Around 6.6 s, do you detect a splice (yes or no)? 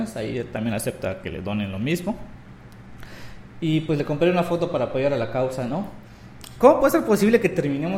yes